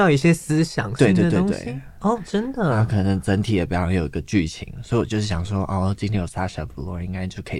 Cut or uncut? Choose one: uncut